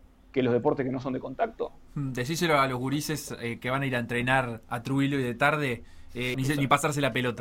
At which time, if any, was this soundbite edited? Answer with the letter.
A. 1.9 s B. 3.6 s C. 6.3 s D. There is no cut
C